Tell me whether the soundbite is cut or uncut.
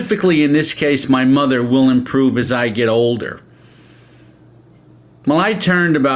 uncut